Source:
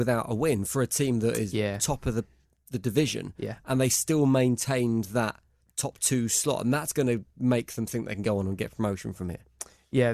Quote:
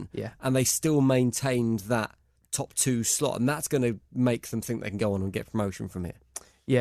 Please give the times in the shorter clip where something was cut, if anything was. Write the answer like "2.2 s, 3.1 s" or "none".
none